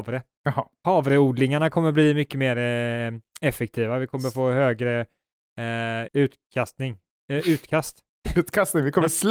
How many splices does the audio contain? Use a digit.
1